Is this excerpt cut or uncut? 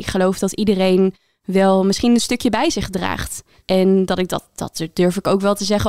uncut